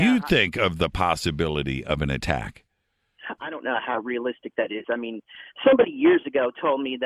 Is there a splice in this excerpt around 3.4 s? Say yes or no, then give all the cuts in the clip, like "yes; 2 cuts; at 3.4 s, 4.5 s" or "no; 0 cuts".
yes; 1 cut; at 3.4 s